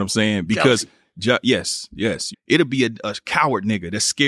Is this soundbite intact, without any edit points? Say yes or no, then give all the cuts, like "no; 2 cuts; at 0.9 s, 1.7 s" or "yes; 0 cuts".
no; 1 cut; at 2.3 s